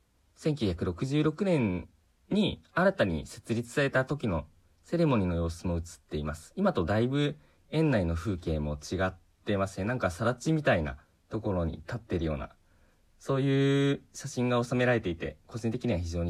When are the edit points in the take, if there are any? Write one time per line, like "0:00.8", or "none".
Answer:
none